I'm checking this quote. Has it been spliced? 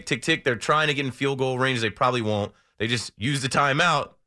no; 0 cuts

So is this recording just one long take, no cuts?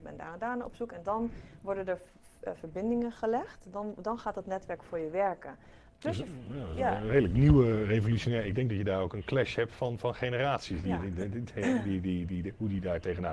no; 1 cut; at 5.9 s

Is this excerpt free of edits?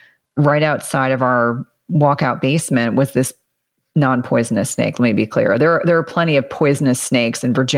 yes; 0 cuts

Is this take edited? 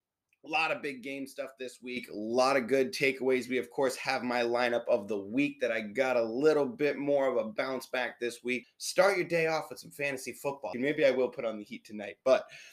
yes; 2 cuts; at 8.6 s, 10.7 s

